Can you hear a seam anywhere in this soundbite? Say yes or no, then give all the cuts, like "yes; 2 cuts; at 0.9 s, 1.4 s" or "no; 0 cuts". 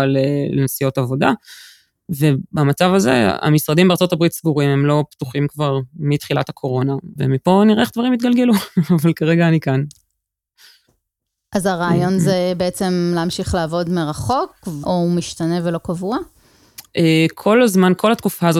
yes; 2 cuts; at 7.2 s, 14.8 s